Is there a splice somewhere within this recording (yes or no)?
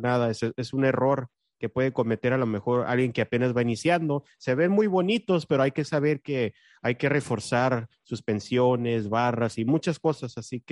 no